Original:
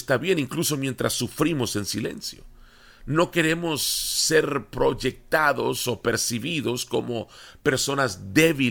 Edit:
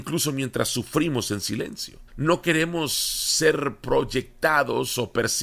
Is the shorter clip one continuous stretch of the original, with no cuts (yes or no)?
no